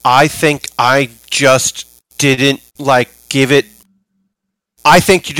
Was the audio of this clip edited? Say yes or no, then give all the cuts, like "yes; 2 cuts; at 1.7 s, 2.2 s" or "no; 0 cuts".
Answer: yes; 1 cut; at 2.7 s